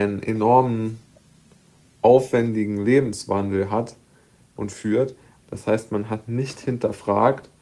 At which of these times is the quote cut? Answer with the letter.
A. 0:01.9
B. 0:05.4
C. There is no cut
B